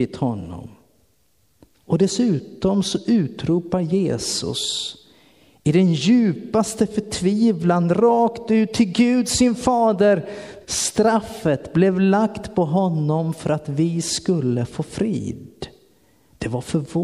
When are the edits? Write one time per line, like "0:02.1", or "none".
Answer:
0:10.6